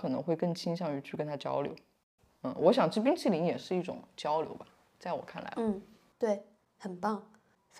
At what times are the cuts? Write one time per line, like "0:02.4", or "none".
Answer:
none